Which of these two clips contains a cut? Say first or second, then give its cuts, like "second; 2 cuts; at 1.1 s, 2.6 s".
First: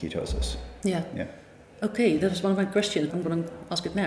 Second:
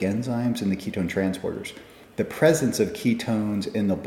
first; 1 cut; at 3.1 s